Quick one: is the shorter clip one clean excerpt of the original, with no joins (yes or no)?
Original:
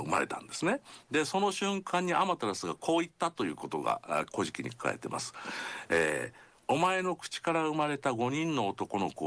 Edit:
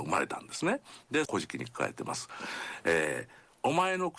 no